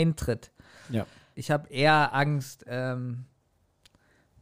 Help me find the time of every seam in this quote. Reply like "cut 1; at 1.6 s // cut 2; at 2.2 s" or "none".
cut 1; at 1.3 s